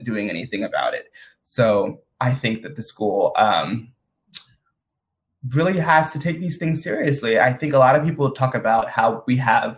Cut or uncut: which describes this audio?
uncut